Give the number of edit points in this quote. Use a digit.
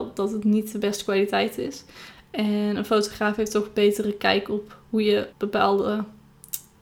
1